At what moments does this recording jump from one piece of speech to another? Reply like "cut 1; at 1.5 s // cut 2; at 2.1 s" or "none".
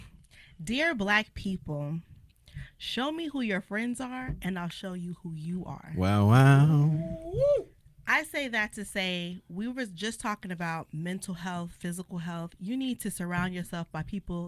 none